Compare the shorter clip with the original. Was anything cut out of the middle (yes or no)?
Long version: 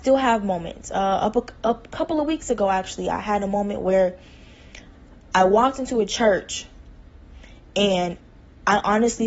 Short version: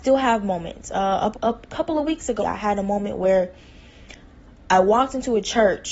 yes